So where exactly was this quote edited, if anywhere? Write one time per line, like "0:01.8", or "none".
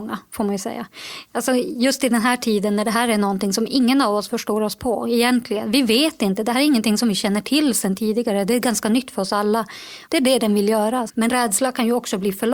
0:10.0
0:11.1